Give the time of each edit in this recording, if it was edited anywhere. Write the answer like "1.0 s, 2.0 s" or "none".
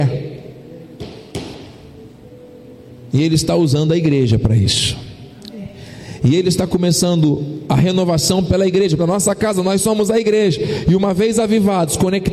9.0 s

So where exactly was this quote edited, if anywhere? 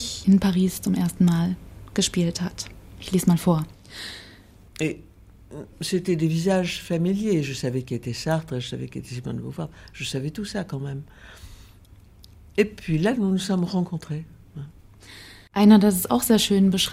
4.7 s

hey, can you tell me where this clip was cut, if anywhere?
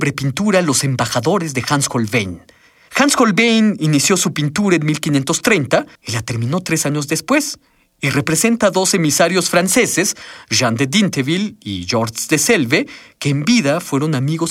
2.9 s, 6.0 s

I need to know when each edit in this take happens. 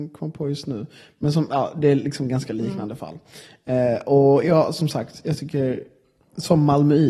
none

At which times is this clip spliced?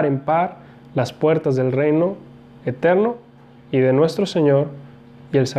none

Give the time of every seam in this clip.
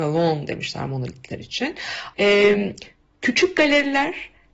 2.1 s

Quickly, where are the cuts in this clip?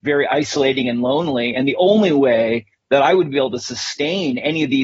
none

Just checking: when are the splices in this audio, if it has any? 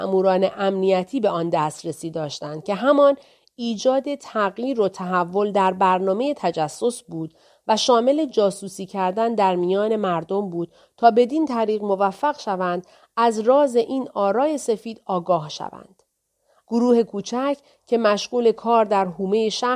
16.6 s

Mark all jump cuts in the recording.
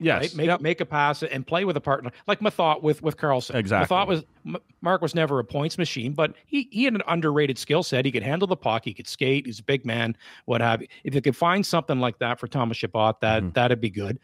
none

